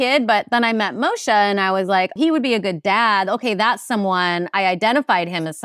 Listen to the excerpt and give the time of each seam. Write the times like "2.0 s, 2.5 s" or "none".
2.2 s